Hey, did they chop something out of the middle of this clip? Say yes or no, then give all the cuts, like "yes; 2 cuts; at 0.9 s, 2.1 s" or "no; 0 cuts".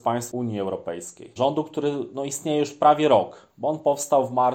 yes; 1 cut; at 1.4 s